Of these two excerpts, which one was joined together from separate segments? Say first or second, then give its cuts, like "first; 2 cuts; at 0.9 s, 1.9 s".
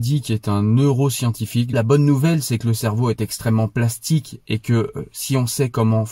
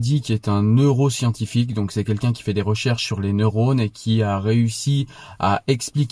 first; 1 cut; at 1.7 s